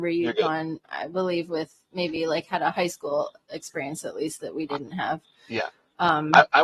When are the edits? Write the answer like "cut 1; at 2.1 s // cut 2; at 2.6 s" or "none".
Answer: none